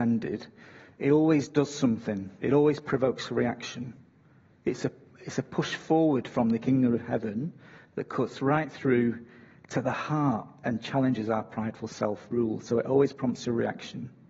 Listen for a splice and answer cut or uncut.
uncut